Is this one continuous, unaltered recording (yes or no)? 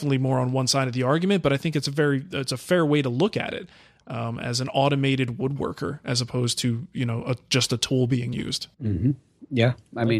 no